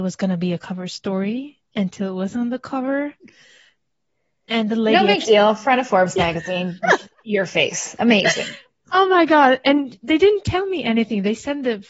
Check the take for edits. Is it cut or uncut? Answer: uncut